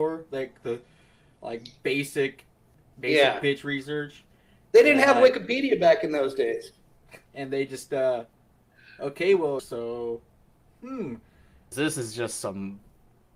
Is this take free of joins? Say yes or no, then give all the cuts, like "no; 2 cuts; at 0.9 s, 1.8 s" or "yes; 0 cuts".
no; 3 cuts; at 7.3 s, 9.6 s, 11.7 s